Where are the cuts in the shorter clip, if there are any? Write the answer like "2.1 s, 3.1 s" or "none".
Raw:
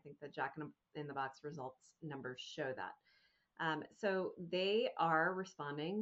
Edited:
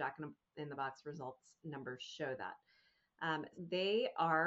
3.5 s